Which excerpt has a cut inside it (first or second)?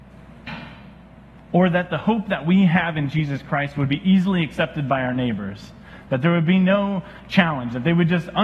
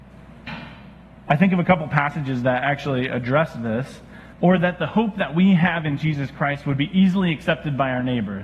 second